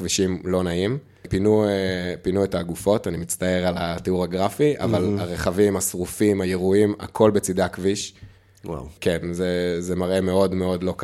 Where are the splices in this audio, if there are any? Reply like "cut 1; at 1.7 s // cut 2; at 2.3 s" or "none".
none